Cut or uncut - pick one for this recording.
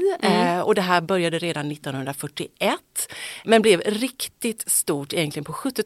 uncut